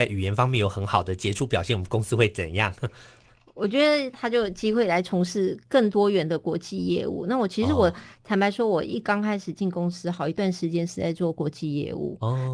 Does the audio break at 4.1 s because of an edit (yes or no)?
yes